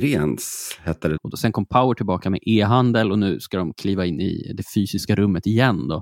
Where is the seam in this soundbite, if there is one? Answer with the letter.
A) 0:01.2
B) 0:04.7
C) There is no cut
A